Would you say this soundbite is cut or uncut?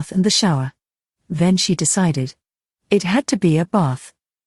uncut